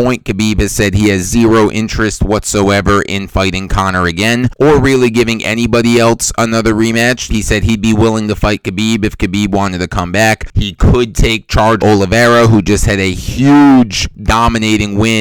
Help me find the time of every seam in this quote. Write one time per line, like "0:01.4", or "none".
0:07.3
0:10.5